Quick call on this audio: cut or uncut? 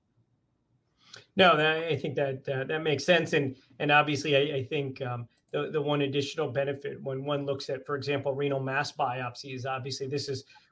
uncut